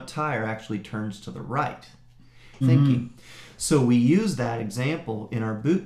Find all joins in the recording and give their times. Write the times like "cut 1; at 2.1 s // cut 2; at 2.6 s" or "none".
cut 1; at 2.6 s